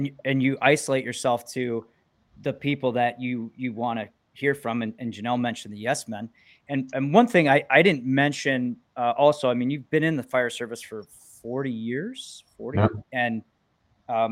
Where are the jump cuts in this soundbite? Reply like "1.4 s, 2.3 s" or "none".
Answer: 13.0 s